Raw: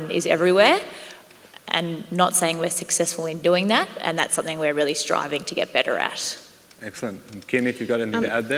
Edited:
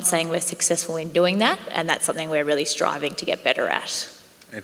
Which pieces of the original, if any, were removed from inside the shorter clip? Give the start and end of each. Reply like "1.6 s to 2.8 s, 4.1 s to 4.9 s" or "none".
none